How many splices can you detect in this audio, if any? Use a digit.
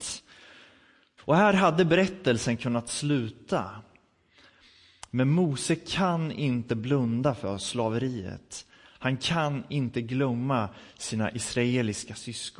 1